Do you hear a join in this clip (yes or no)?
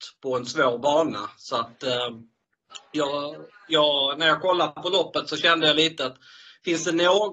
no